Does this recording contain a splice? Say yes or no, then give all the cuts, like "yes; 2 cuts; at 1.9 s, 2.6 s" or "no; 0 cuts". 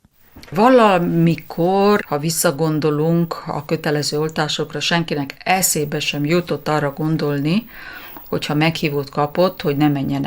yes; 1 cut; at 2.0 s